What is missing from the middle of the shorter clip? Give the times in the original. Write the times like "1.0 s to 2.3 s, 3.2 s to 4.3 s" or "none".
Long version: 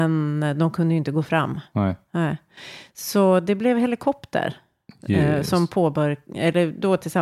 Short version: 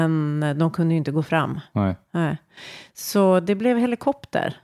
none